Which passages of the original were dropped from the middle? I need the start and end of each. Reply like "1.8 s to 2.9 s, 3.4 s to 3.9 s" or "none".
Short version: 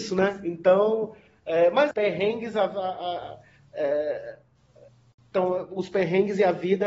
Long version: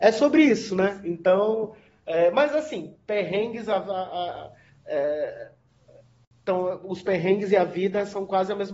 2.5 s to 3.0 s